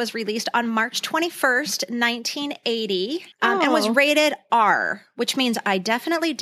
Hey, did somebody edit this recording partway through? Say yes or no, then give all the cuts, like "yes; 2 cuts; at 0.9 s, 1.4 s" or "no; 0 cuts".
yes; 1 cut; at 3.3 s